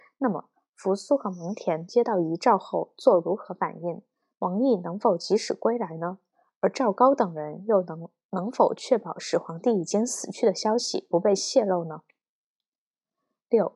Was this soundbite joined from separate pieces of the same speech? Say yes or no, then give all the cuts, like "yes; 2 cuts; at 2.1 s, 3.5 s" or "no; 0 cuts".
no; 0 cuts